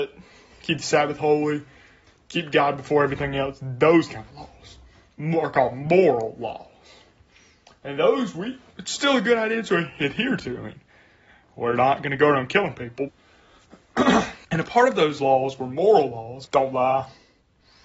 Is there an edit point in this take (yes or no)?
yes